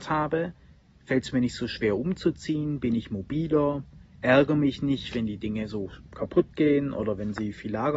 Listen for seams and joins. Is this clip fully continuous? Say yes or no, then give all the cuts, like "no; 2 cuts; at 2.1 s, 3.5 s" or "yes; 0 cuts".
yes; 0 cuts